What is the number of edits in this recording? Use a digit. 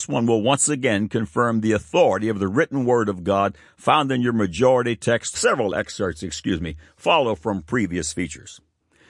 1